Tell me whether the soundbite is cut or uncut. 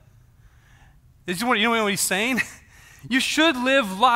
uncut